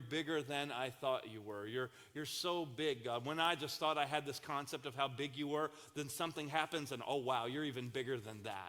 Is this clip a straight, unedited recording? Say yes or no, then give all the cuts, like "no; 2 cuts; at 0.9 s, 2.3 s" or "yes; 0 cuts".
yes; 0 cuts